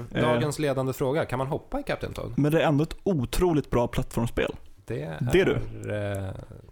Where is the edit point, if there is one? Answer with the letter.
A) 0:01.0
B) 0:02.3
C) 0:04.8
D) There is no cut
B